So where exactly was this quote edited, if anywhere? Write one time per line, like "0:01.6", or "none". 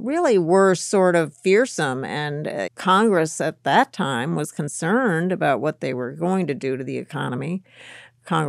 0:02.7